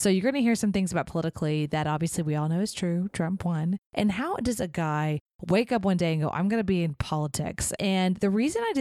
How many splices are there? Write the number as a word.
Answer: two